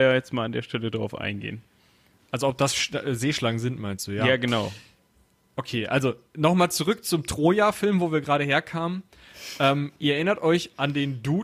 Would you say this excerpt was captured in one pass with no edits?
yes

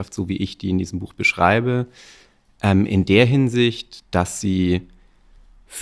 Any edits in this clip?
no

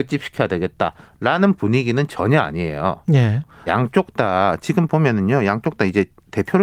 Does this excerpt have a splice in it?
yes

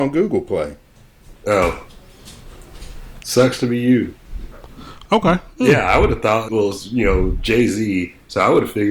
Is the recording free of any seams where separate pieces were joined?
no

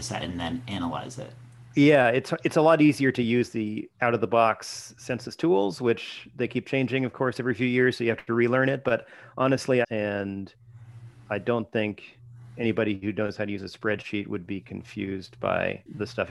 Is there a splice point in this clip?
yes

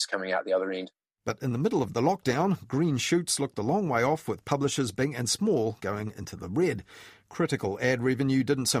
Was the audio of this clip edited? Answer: no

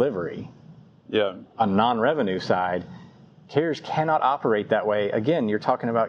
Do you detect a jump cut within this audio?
no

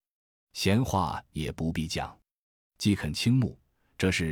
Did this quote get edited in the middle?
no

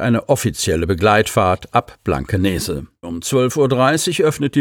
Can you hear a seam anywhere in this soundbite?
yes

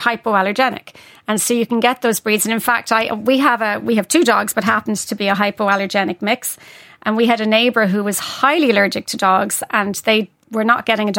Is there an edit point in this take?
yes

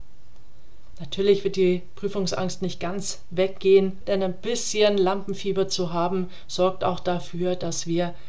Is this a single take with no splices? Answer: no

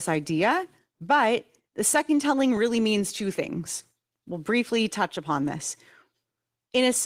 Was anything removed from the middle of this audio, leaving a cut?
no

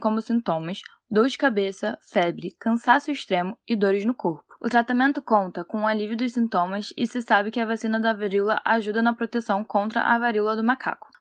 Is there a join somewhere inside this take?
yes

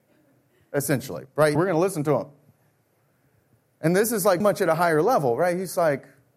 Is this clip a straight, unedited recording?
no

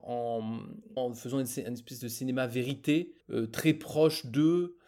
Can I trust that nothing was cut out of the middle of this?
no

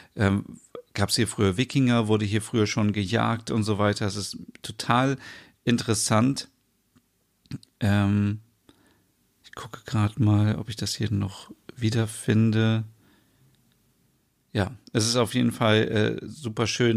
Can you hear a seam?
no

